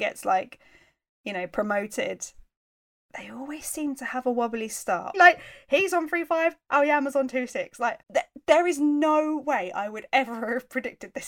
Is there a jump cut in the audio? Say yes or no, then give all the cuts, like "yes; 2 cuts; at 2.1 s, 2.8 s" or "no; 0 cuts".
yes; 2 cuts; at 5.1 s, 8.0 s